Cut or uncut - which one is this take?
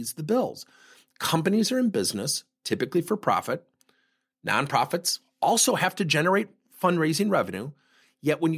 uncut